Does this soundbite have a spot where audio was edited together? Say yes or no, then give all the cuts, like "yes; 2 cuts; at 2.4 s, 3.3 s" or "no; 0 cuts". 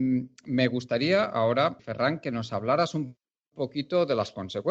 yes; 1 cut; at 1.8 s